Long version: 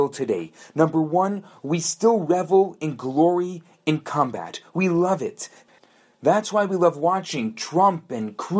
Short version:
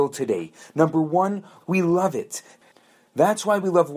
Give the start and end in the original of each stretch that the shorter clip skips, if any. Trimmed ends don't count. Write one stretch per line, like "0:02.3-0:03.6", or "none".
0:01.6-0:04.7